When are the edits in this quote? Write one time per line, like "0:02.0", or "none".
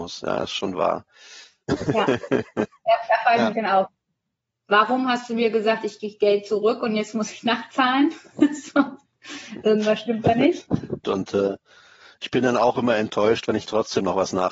0:11.0